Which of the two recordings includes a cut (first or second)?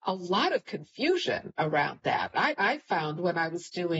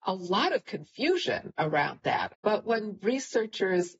second